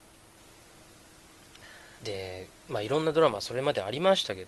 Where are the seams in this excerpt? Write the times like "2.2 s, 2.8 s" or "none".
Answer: 2.0 s

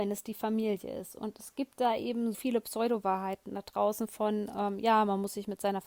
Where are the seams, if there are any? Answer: 2.3 s

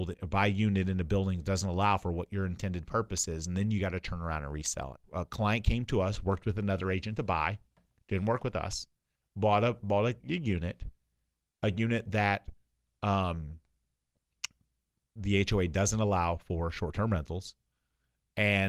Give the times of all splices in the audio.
5.0 s

